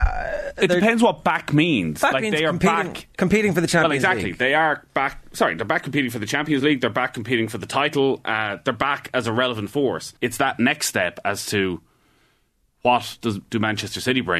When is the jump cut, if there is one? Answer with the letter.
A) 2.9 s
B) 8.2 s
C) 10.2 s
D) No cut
C